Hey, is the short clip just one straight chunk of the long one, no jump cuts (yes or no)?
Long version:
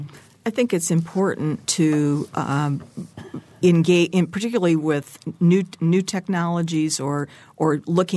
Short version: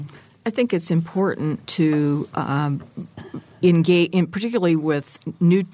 yes